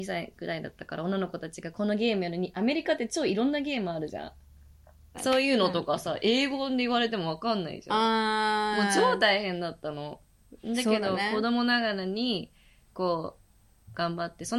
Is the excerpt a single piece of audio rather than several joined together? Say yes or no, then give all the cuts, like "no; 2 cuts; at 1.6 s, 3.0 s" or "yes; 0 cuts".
no; 1 cut; at 5.1 s